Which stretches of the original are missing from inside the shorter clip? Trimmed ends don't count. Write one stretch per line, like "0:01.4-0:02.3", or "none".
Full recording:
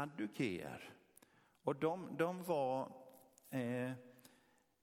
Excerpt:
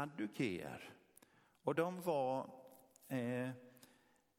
0:01.8-0:02.2